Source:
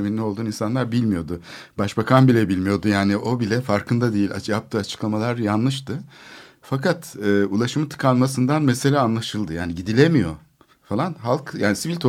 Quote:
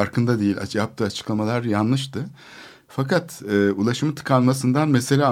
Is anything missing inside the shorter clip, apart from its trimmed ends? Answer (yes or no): no